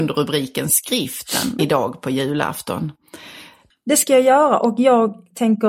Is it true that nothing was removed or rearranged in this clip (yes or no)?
no